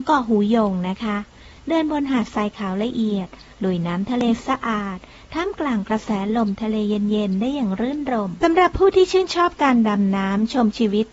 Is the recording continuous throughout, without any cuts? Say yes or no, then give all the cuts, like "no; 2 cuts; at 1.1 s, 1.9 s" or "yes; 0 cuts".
no; 1 cut; at 4.4 s